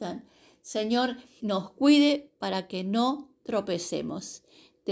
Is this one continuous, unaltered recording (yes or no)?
no